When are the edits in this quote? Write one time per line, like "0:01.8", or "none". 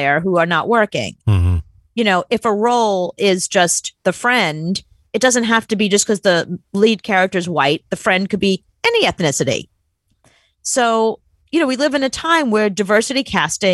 none